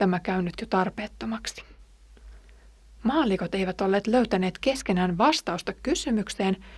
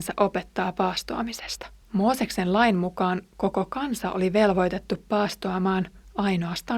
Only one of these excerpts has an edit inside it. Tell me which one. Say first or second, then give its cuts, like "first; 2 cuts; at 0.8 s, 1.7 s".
second; 1 cut; at 1.8 s